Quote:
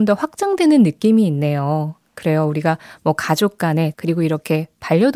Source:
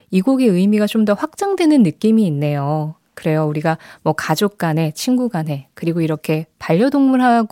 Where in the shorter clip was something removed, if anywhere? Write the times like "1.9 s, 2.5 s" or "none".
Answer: 3.9 s